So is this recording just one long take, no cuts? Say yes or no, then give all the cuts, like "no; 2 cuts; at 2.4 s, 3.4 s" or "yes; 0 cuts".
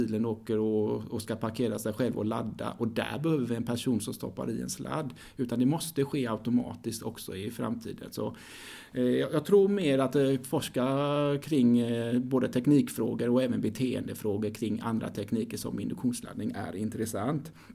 yes; 0 cuts